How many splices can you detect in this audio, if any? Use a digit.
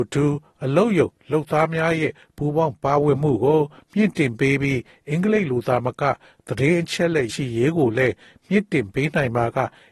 1